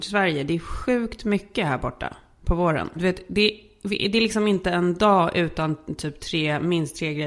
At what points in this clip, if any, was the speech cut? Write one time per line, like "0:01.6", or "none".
0:03.0